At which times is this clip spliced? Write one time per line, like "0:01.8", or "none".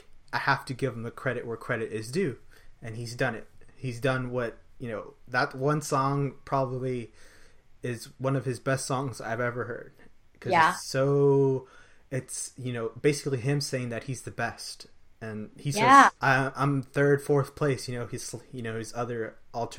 0:16.2